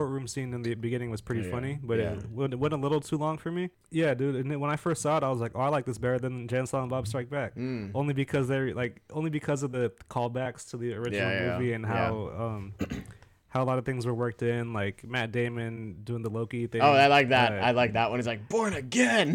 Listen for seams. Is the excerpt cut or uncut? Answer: uncut